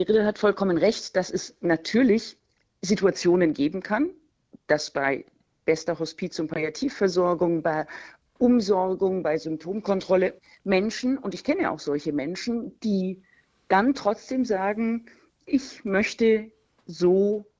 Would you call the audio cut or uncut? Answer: uncut